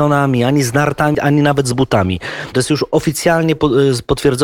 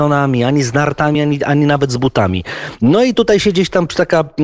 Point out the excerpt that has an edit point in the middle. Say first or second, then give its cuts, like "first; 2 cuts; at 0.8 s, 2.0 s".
first; 2 cuts; at 1.1 s, 2.5 s